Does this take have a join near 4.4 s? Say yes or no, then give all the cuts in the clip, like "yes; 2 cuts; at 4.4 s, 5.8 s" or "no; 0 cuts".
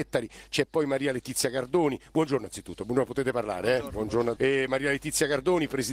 yes; 1 cut; at 4.4 s